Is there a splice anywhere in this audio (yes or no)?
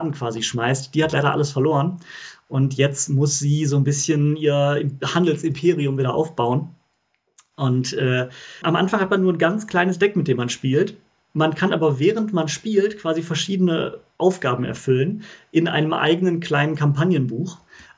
yes